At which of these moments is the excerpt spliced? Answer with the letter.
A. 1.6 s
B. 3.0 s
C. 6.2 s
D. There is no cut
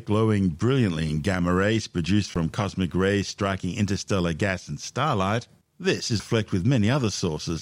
C